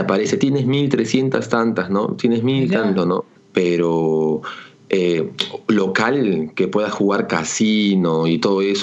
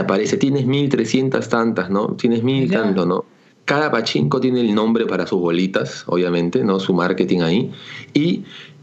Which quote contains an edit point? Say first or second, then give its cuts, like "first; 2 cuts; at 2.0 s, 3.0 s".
first; 1 cut; at 3.3 s